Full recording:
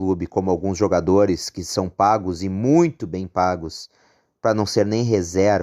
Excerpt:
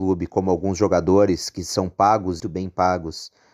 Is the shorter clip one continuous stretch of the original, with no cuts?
no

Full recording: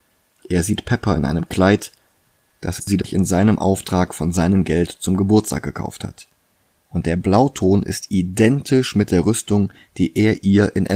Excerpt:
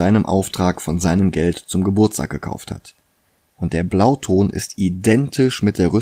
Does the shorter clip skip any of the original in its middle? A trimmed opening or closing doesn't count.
no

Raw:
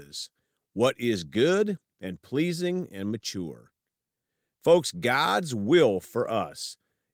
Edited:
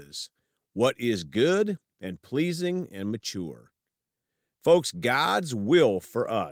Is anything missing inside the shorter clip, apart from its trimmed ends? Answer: no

